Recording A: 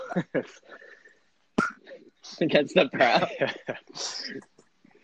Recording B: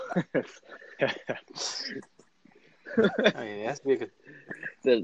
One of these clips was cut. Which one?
B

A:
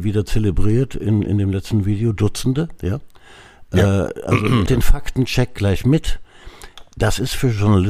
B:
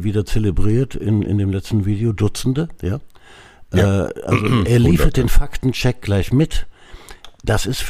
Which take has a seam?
A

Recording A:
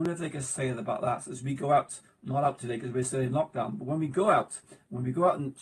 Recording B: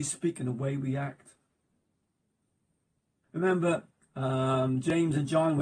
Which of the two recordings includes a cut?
B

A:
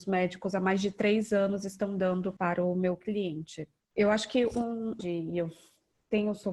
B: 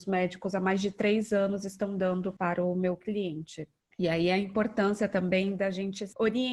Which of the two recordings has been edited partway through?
A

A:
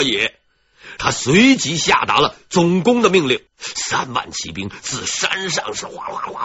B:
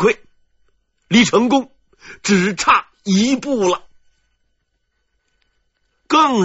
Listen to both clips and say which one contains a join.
A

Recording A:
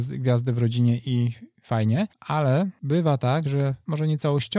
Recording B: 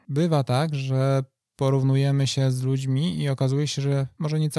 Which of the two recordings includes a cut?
A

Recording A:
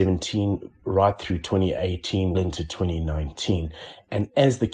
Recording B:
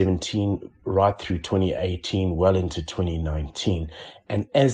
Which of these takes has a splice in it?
A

